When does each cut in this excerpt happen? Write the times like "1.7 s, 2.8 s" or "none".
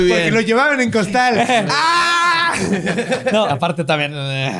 3.5 s